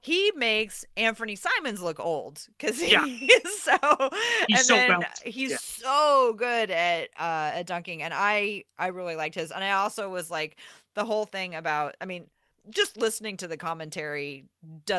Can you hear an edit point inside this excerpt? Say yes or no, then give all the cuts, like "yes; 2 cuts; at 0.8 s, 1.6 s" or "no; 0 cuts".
no; 0 cuts